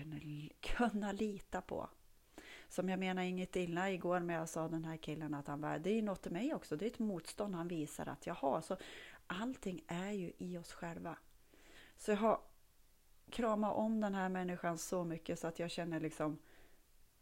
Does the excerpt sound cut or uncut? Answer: uncut